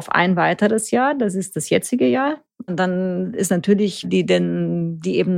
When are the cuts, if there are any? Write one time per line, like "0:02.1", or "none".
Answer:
0:02.7
0:04.0